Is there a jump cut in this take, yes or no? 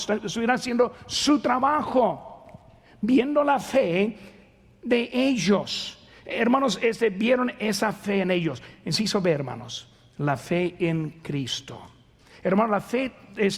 no